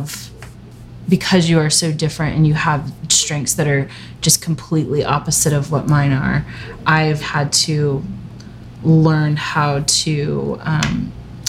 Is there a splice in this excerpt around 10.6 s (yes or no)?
no